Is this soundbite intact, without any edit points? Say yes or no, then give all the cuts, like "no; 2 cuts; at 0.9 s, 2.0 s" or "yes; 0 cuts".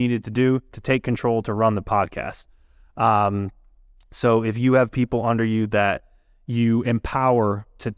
yes; 0 cuts